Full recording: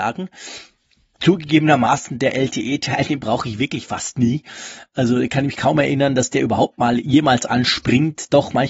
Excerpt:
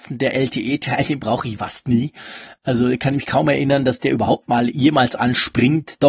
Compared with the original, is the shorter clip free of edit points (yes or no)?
no